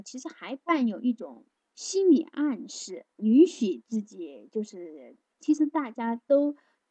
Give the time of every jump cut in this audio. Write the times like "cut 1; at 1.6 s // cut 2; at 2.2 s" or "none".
cut 1; at 3.2 s // cut 2; at 5.3 s

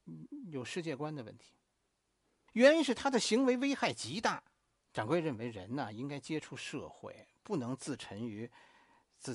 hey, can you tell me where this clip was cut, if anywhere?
cut 1; at 2.5 s // cut 2; at 4.8 s

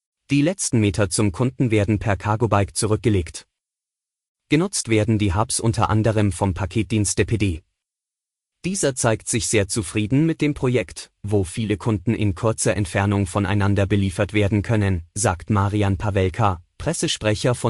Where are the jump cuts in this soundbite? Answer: cut 1; at 11.2 s

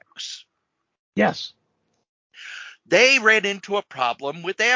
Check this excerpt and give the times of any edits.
none

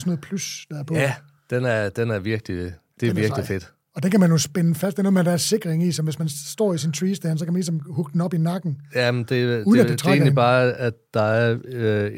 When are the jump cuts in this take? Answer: none

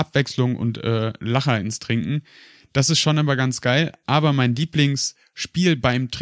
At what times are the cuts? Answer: none

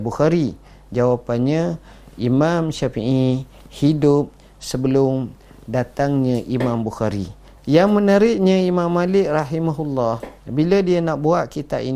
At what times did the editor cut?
cut 1; at 7.6 s

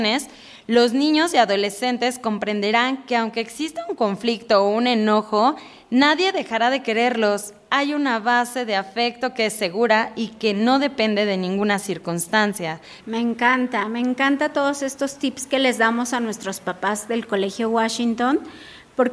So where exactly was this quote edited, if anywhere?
cut 1; at 13.0 s

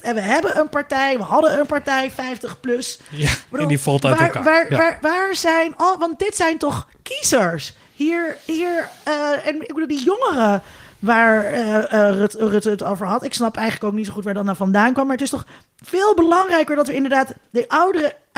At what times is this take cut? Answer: cut 1; at 5.0 s

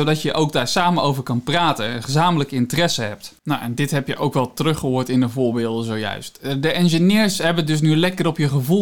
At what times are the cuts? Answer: none

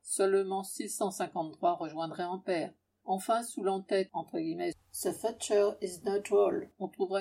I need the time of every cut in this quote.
cut 1; at 2.9 s

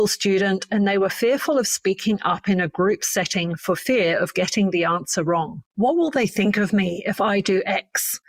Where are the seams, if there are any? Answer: cut 1; at 5.7 s

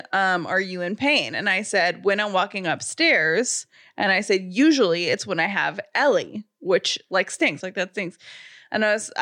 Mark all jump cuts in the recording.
cut 1; at 7.6 s

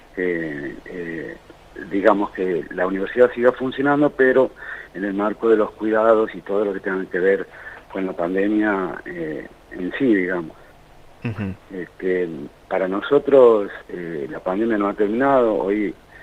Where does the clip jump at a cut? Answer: none

